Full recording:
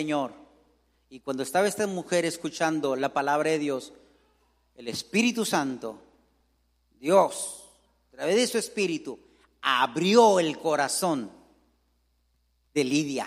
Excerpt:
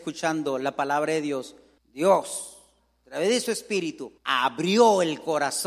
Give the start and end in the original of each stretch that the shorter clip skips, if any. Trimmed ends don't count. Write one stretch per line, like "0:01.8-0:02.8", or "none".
0:04.1-0:06.8
0:09.2-0:09.6